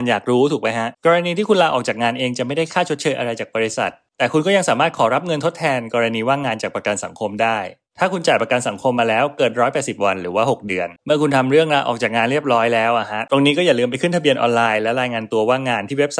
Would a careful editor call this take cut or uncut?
cut